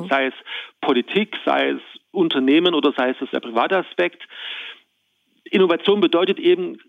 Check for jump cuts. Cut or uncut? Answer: cut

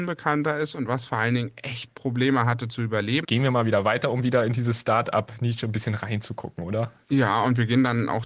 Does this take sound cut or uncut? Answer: cut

